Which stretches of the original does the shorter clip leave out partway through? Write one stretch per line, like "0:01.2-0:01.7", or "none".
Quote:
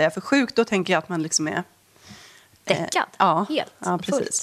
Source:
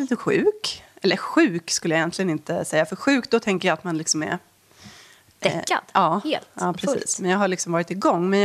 none